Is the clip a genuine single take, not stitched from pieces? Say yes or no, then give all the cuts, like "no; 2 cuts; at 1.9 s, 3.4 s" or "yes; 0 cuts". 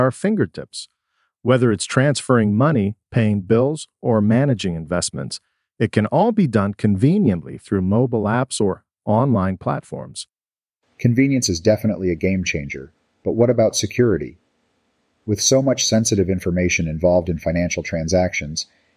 yes; 0 cuts